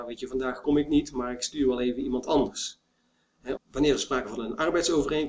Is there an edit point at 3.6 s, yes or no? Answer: yes